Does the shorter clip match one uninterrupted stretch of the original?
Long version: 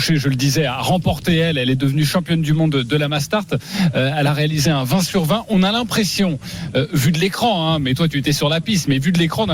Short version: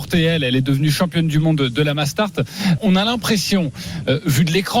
no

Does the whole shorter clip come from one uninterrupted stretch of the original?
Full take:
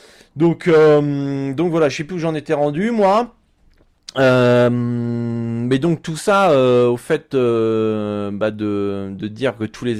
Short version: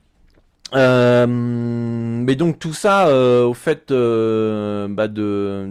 yes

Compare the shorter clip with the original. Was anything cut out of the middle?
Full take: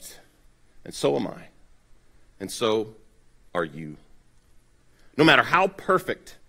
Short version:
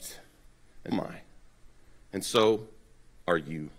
yes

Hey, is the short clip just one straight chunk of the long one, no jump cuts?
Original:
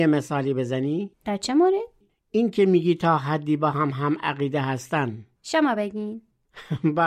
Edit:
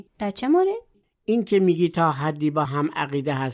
no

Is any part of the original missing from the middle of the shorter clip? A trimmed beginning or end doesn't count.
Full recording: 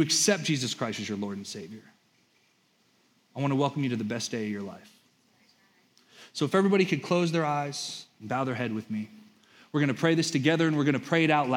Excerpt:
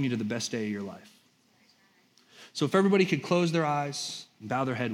no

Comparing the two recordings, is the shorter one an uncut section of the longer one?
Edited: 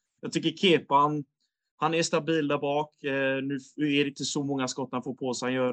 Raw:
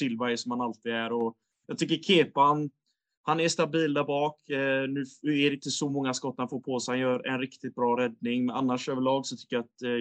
yes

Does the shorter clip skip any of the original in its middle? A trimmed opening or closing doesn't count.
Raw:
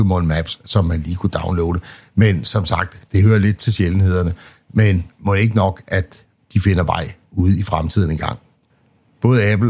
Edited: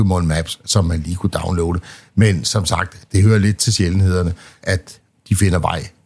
yes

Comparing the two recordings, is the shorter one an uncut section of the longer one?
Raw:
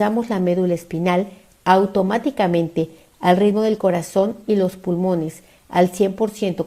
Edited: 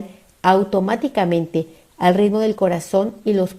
yes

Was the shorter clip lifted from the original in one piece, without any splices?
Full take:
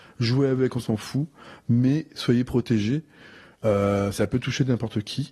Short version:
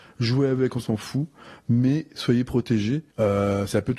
no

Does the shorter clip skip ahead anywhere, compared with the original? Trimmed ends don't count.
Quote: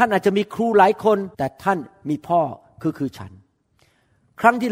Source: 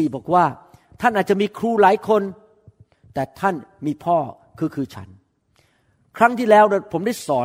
yes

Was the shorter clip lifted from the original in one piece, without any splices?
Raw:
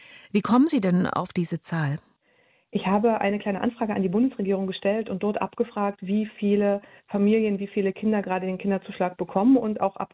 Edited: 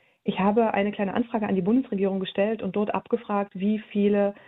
yes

